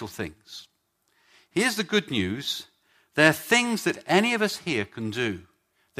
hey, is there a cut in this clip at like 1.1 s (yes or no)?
no